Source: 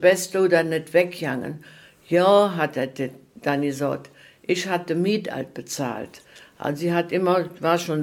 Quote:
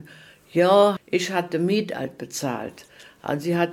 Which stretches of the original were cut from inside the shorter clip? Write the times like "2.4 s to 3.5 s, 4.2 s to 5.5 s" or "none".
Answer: 2.5 s to 4.3 s